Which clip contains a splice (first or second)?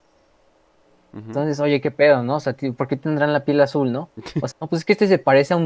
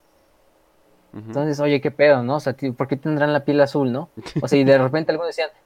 first